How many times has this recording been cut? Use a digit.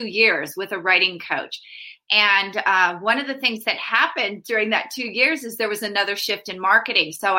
0